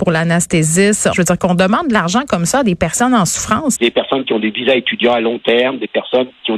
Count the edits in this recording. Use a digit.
2